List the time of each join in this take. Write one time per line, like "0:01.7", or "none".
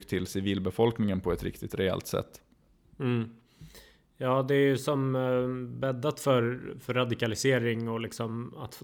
none